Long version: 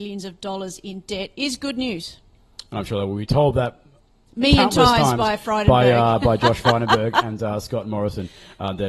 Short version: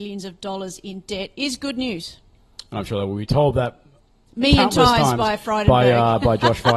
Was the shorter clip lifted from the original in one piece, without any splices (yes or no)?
yes